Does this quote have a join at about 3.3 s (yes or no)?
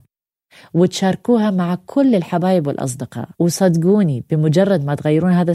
yes